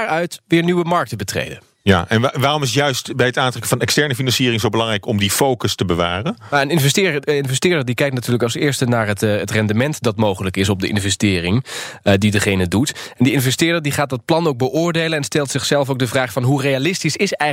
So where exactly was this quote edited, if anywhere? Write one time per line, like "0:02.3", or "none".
none